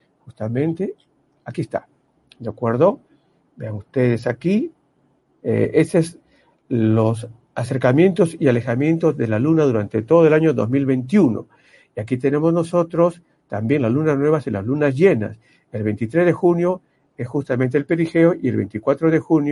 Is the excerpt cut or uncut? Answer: uncut